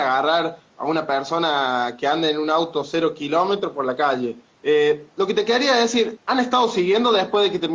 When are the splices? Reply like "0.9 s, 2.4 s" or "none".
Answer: 4.5 s, 6.2 s